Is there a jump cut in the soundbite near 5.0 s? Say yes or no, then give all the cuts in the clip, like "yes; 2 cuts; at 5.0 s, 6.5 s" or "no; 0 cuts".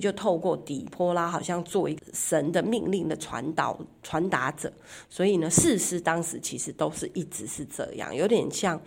no; 1 cut; at 2.0 s